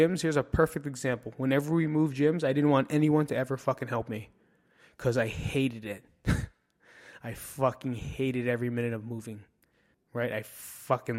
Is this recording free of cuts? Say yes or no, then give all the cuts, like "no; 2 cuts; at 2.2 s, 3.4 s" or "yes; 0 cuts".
no; 1 cut; at 9.9 s